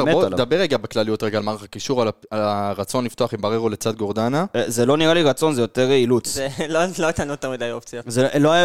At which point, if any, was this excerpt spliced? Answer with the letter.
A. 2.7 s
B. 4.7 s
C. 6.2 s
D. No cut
D